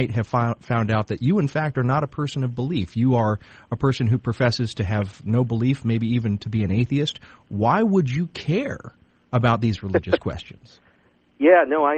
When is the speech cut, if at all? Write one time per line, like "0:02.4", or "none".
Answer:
none